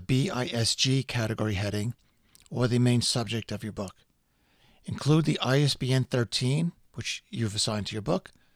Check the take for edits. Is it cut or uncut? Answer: uncut